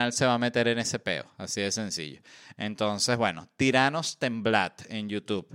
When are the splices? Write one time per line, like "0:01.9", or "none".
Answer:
none

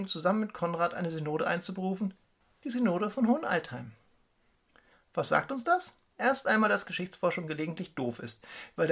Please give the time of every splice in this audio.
0:06.1

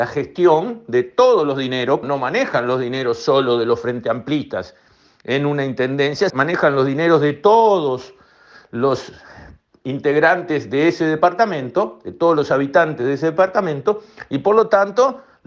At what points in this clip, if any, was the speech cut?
0:02.0
0:06.3

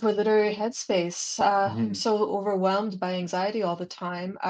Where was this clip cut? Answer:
none

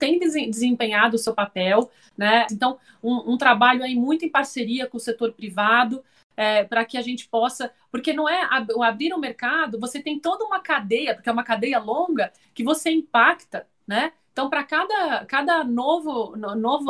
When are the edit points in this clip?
0:02.5

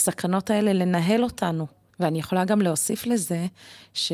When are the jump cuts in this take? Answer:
0:01.9

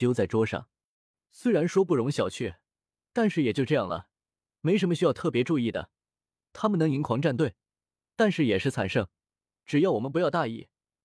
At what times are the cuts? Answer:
none

